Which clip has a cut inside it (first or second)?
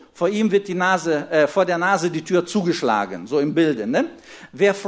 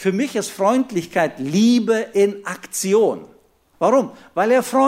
second